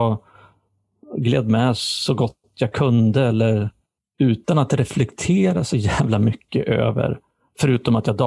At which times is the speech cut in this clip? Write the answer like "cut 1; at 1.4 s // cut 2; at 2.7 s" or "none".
none